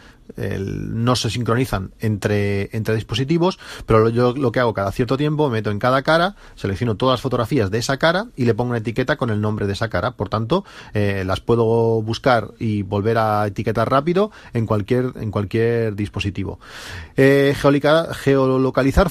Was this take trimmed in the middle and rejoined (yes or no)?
no